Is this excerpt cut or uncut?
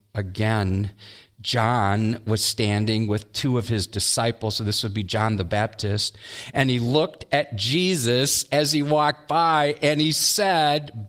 uncut